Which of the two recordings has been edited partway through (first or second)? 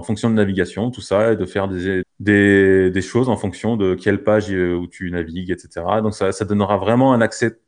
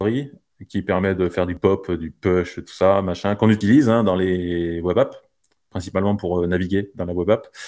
first